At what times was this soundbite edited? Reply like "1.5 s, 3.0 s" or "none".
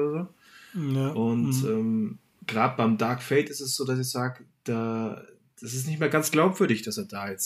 2.4 s